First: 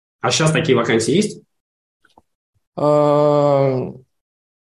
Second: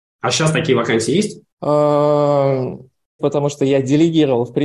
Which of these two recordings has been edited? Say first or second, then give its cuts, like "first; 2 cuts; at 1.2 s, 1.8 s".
second; 2 cuts; at 1.5 s, 3.2 s